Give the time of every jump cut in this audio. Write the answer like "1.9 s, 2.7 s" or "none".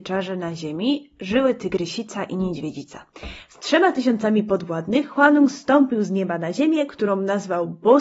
3.4 s